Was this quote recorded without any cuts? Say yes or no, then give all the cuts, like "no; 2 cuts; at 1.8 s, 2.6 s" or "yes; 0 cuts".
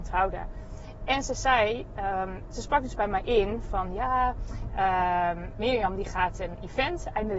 yes; 0 cuts